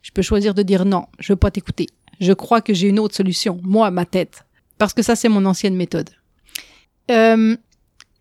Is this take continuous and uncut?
no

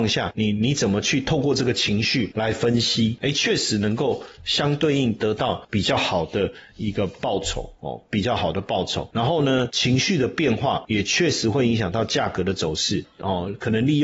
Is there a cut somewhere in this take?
yes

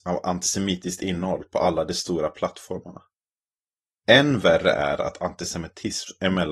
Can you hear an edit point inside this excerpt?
no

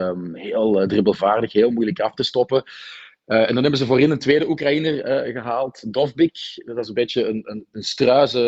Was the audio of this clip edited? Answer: no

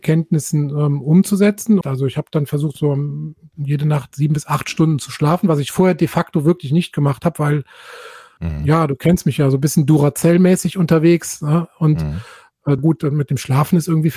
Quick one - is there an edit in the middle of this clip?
yes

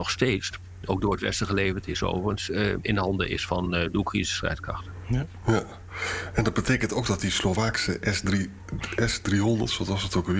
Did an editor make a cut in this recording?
no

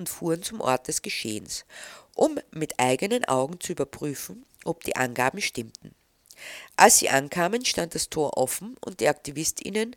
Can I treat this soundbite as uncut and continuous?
yes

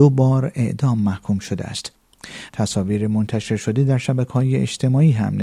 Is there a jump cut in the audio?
yes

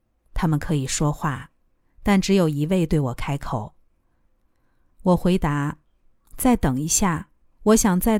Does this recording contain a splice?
yes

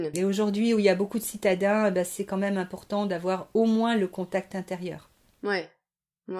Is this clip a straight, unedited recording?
yes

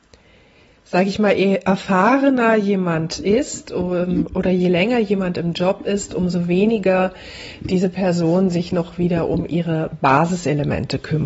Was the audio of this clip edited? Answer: no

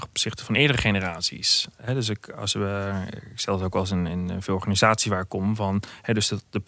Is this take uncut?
yes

